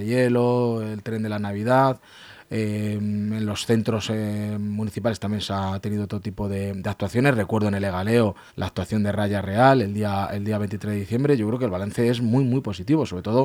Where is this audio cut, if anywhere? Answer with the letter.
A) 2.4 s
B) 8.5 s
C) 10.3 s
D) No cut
B